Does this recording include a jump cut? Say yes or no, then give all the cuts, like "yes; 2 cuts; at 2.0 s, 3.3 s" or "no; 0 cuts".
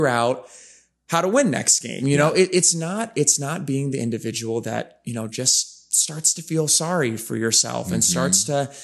no; 0 cuts